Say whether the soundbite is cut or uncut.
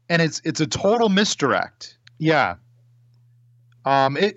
cut